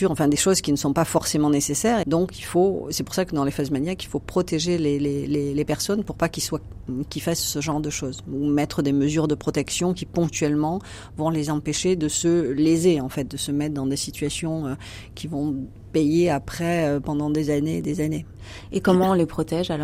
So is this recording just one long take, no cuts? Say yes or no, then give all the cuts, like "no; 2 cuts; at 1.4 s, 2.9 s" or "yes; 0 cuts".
no; 1 cut; at 2.0 s